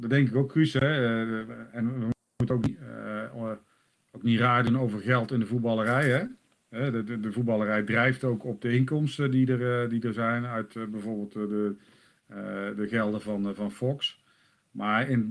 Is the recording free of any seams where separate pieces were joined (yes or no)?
yes